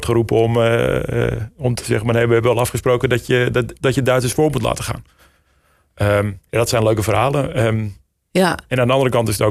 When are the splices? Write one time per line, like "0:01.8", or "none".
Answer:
0:06.5